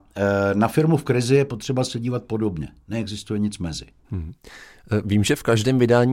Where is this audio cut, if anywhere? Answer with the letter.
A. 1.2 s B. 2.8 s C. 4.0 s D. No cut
C